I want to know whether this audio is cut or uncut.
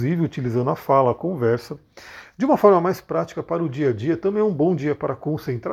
uncut